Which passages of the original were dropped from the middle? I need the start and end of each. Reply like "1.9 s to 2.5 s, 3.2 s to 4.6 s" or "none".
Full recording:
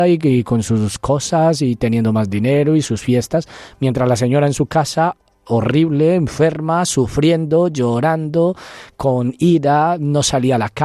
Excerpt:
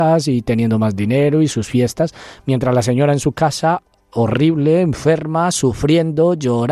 none